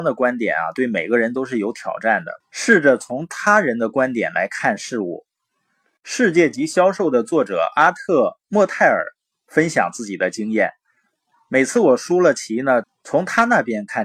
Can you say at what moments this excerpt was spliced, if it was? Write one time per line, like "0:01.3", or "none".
0:02.4
0:12.8